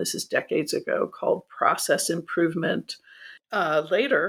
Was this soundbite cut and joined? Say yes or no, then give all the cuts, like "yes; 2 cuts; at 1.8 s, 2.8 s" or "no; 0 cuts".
yes; 1 cut; at 3.4 s